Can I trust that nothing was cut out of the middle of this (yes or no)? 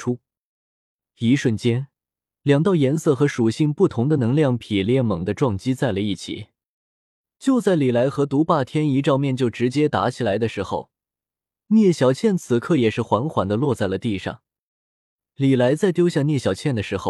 yes